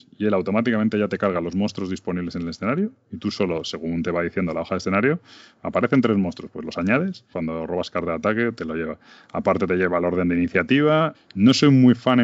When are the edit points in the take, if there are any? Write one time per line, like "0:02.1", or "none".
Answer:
0:07.3
0:11.1